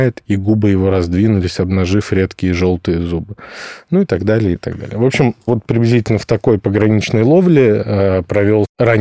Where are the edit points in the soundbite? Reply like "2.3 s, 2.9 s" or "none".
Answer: 4.6 s

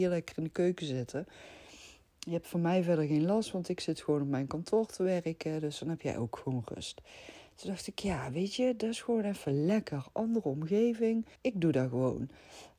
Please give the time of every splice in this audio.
11.3 s

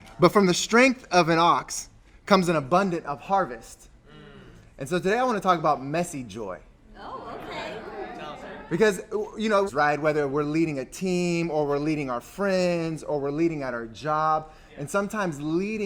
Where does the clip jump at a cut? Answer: 9.7 s

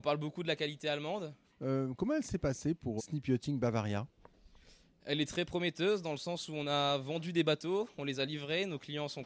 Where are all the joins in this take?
1.4 s, 3.0 s

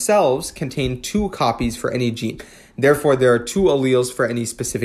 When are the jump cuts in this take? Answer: none

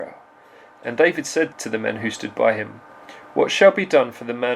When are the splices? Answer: 1.5 s

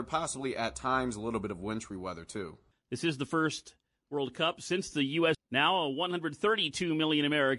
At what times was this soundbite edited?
2.7 s, 5.3 s

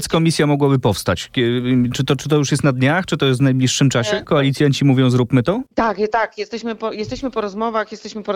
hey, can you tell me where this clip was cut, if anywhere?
4.3 s, 5.7 s

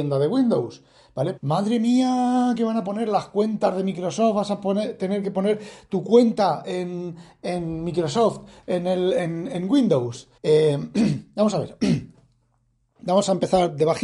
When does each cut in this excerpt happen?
1.4 s, 10.4 s

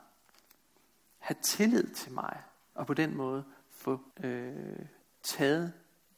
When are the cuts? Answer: 2.7 s, 4.1 s

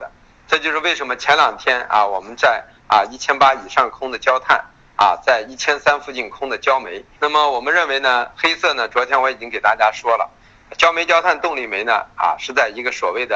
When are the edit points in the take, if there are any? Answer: 7.1 s

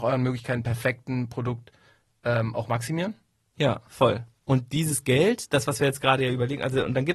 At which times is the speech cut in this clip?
3.9 s

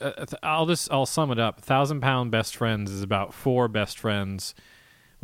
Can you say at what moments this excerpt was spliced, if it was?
none

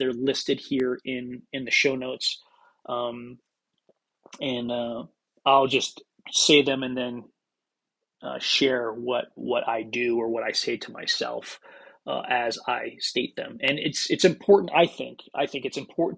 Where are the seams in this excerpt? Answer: none

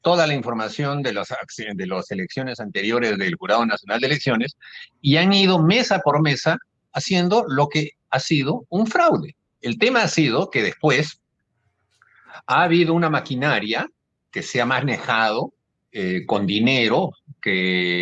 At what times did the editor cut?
9.6 s

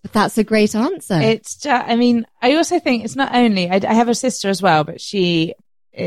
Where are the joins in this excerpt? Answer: none

